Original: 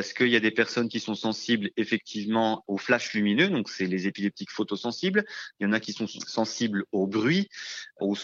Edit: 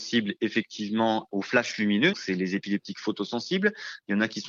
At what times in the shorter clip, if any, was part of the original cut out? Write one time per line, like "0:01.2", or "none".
0:02.1